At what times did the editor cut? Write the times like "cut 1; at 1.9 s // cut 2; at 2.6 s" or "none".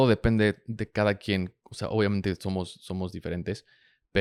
none